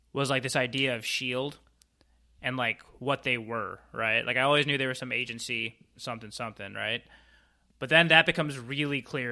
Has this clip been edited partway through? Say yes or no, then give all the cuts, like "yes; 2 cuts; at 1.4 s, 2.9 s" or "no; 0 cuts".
yes; 1 cut; at 6.0 s